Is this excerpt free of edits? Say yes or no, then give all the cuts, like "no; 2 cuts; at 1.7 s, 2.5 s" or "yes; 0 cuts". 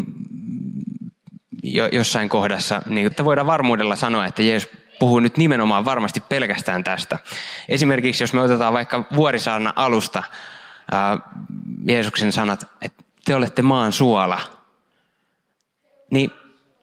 no; 1 cut; at 3.1 s